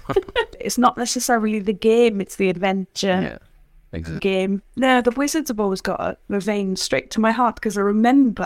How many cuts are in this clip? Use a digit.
1